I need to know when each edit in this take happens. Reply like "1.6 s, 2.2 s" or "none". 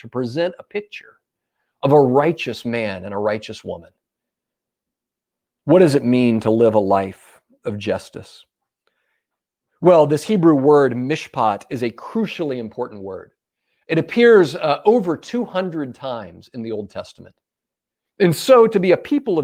18.0 s